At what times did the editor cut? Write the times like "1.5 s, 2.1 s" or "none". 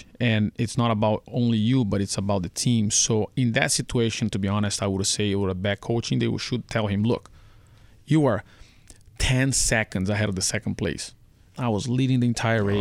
11.5 s

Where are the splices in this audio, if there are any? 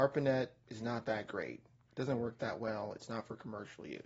none

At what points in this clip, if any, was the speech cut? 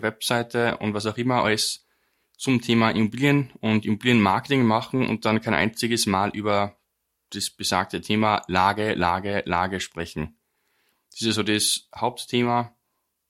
none

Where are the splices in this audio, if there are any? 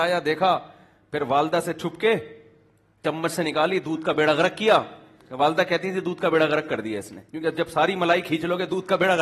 7.3 s

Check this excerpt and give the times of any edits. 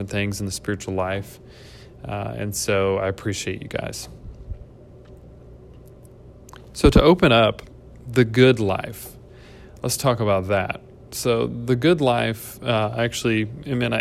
none

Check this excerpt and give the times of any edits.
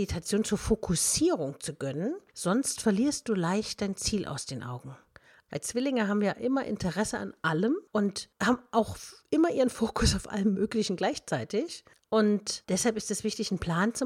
5.5 s

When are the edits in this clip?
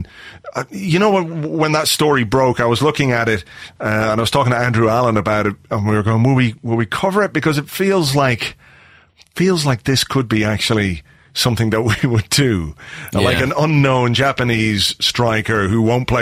none

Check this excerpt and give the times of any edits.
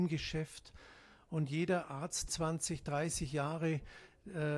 2.3 s

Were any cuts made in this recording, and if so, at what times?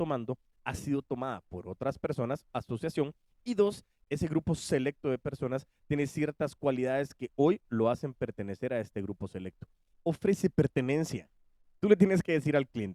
2.5 s, 4.0 s, 9.9 s

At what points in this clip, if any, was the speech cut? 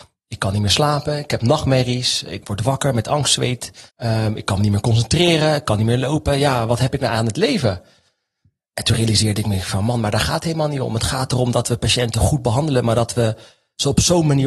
3.9 s

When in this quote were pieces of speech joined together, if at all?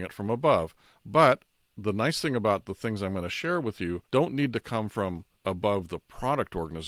4.1 s, 5.4 s

